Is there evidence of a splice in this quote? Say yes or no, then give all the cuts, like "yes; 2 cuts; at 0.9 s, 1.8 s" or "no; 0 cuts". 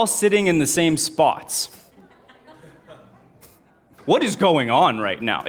yes; 1 cut; at 4.0 s